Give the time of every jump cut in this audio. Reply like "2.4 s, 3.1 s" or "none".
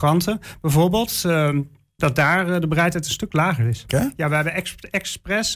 2.0 s, 3.9 s